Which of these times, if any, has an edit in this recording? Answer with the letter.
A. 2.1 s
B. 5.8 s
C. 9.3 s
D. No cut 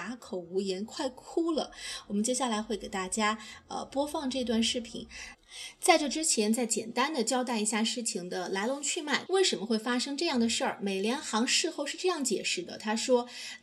C